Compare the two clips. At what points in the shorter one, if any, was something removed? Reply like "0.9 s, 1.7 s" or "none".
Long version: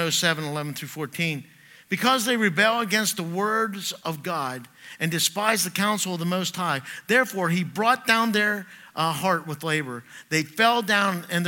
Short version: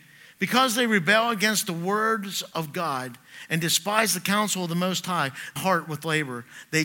5.6 s